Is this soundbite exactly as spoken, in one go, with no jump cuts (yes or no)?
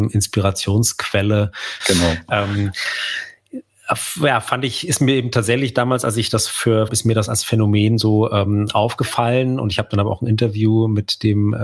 no